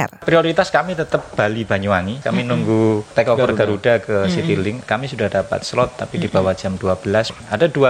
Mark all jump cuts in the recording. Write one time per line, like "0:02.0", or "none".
none